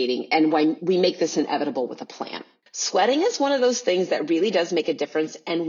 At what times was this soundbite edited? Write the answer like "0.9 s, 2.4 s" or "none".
2.7 s